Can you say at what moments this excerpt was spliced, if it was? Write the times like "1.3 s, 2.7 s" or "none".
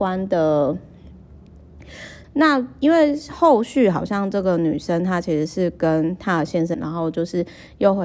2.2 s, 6.7 s